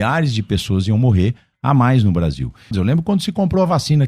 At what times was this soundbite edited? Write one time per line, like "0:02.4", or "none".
0:02.7